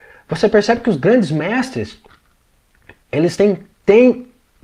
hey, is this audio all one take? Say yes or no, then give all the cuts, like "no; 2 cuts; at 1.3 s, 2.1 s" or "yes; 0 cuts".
yes; 0 cuts